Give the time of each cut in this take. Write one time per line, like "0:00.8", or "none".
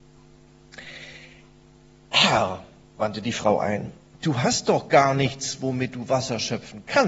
none

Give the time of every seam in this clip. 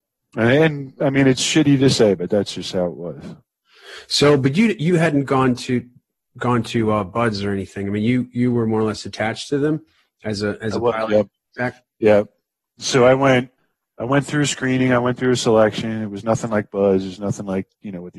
none

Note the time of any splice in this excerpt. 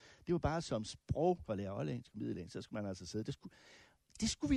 0:01.5

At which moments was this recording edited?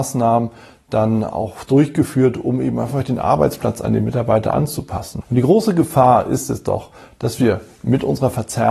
0:05.2

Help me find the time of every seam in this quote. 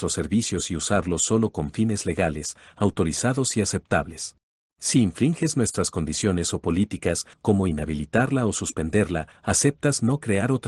0:04.6
0:07.3
0:09.3

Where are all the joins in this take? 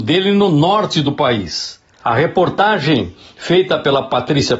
0:02.0

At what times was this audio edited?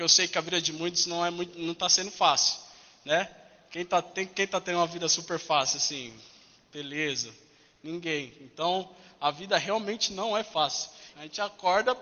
0:11.1

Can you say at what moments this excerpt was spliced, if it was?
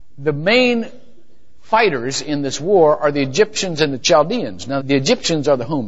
0:04.8

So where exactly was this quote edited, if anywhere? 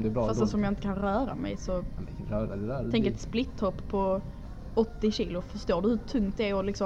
none

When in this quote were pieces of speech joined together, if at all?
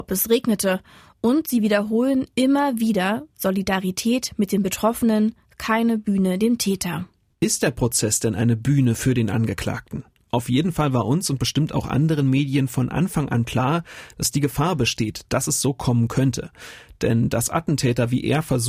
none

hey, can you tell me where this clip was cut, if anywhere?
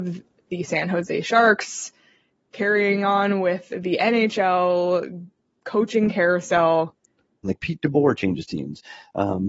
0:07.4

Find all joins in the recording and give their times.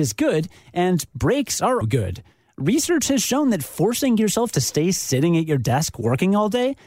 0:01.8

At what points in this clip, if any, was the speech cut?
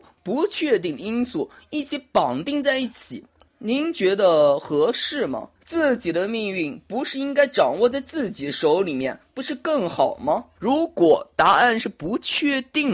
0:03.4
0:05.5
0:10.6

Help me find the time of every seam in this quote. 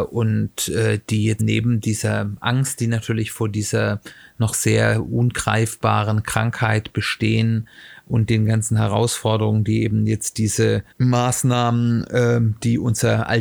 0:01.4
0:10.9

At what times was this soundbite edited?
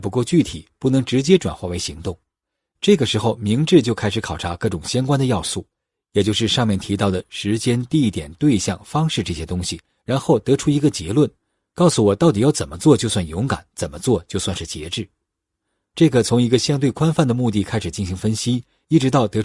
none

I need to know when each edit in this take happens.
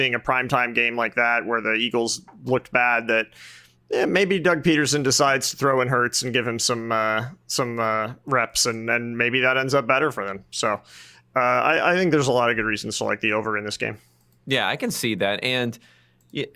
none

